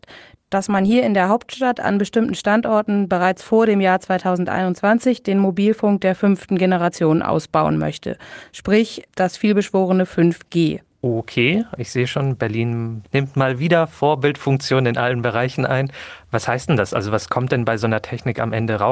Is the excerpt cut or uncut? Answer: cut